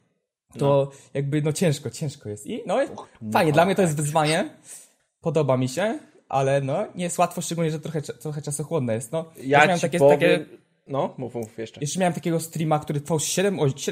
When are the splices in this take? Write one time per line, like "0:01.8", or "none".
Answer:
none